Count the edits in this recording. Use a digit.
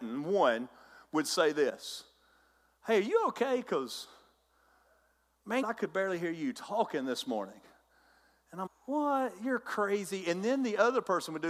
2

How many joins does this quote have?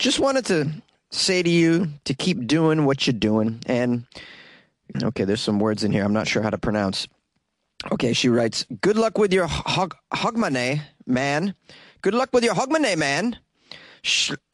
1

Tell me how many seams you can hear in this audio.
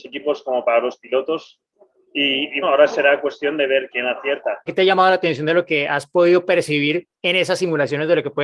2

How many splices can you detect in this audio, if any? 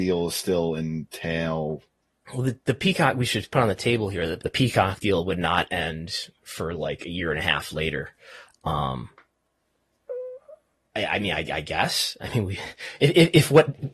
2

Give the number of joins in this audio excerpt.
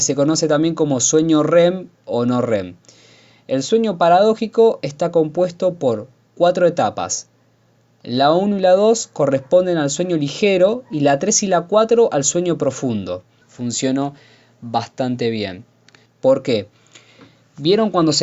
2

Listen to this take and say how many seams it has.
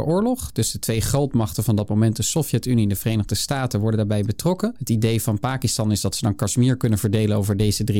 1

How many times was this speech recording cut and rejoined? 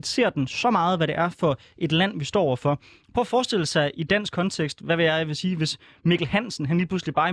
0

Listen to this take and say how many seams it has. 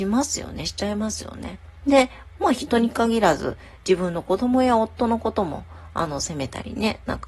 1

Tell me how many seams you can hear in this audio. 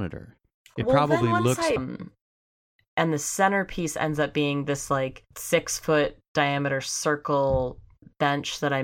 2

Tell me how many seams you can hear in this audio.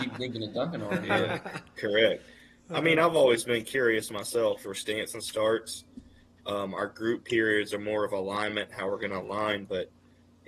1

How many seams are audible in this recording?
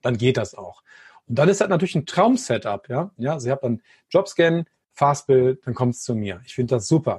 1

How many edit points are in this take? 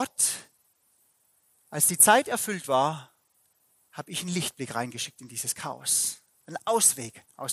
1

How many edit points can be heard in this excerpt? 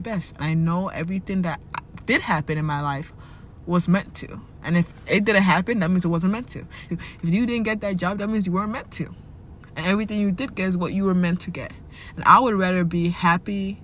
1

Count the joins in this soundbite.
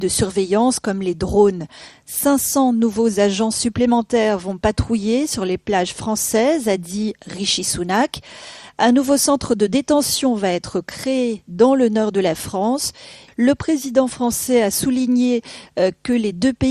1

